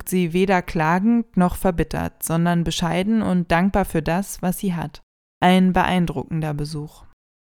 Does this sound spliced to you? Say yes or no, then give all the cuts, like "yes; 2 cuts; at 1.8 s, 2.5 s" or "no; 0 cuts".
no; 0 cuts